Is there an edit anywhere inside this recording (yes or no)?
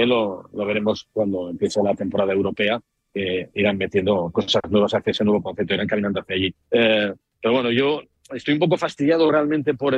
yes